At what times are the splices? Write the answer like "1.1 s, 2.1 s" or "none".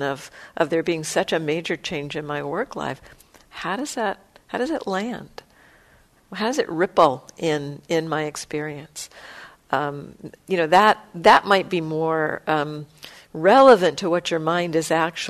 none